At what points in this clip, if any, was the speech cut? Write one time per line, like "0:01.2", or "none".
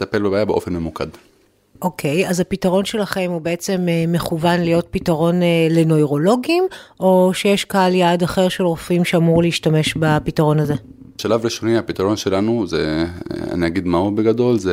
none

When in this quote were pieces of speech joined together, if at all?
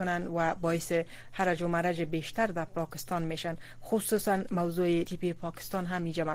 0:05.0

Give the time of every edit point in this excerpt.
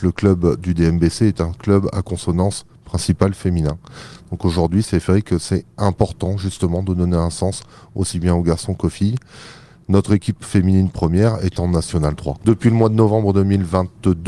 0:12.4

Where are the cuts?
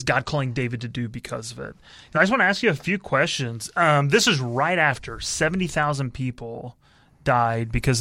0:02.1

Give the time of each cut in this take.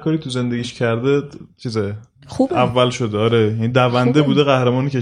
none

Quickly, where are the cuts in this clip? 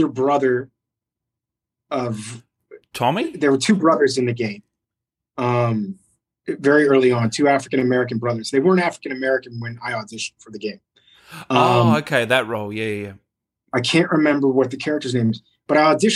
none

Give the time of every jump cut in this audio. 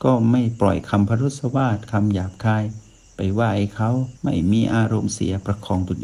0:04.2

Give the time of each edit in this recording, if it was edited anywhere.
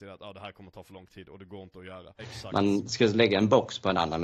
0:02.2

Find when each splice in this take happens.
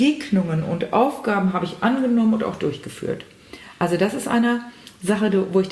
none

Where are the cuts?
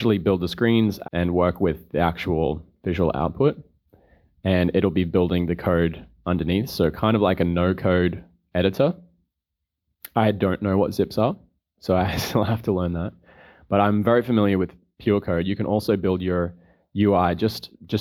0:01.0

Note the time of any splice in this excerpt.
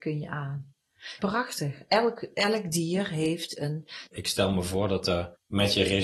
0:01.2
0:04.1

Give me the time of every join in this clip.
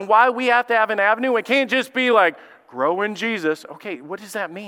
none

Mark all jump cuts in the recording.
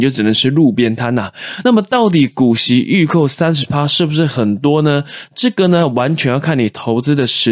none

